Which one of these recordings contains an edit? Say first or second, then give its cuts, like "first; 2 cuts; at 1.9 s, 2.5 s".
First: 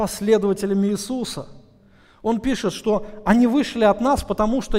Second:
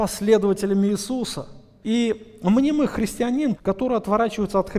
second; 2 cuts; at 1.8 s, 3.6 s